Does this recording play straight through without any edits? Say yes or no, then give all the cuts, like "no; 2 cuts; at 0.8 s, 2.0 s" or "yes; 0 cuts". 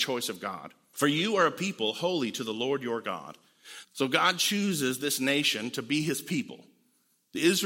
no; 2 cuts; at 0.9 s, 3.8 s